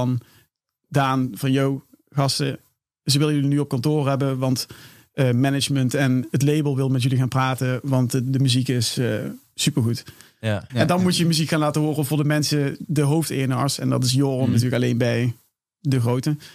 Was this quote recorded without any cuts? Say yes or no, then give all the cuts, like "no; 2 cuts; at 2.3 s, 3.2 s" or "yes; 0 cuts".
no; 2 cuts; at 10.7 s, 14.5 s